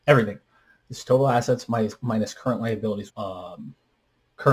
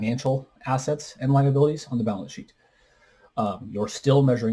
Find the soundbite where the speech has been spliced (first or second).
first